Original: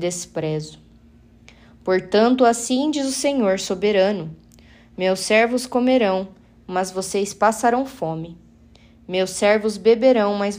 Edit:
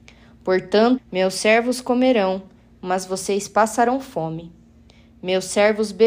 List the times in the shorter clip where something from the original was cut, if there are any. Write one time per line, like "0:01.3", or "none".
0:01.0